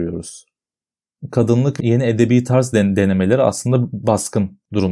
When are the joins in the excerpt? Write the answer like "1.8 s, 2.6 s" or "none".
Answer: 1.8 s